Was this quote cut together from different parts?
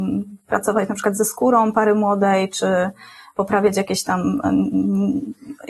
no; 0 cuts

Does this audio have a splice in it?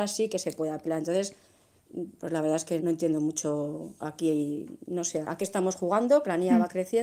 yes; 2 cuts; at 2.8 s, 5.2 s

